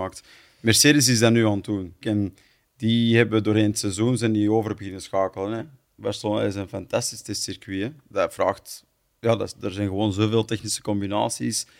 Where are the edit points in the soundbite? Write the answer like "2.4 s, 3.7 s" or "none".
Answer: 2.0 s, 5.6 s